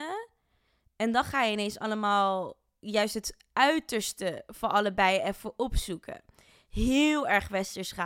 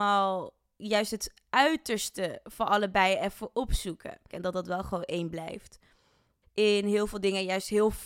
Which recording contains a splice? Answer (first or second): second